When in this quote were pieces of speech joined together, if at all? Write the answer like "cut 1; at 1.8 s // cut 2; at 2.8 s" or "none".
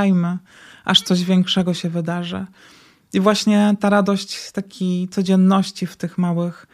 none